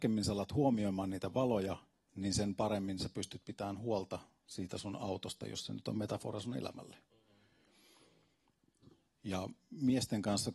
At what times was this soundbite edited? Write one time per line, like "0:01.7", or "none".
0:09.1